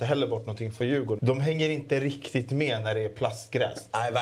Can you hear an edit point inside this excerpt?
yes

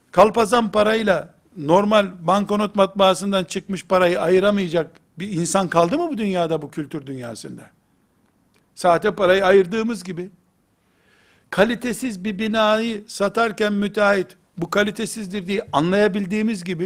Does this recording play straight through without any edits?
no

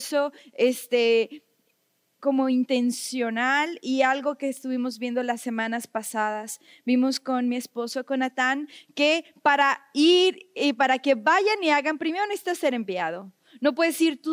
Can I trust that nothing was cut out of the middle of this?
yes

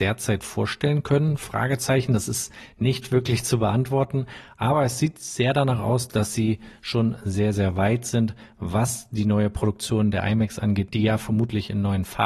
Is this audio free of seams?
yes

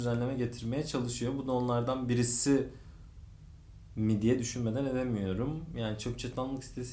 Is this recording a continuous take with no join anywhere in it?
yes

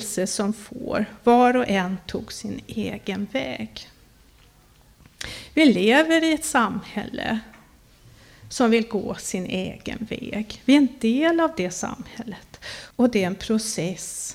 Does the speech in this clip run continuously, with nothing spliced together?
no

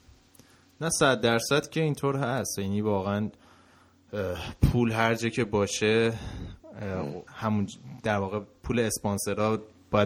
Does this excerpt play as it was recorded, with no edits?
no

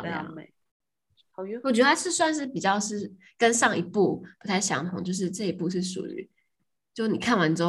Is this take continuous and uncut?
yes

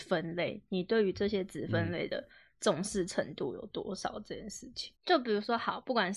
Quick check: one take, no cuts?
no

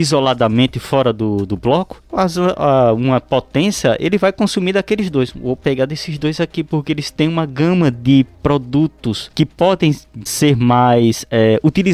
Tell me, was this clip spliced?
yes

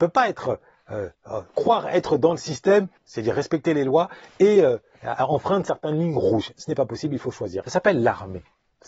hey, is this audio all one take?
no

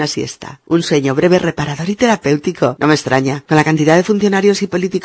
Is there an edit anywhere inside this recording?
no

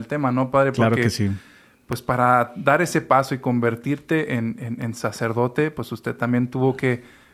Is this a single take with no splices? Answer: yes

